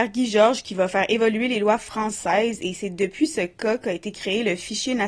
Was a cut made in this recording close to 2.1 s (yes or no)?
no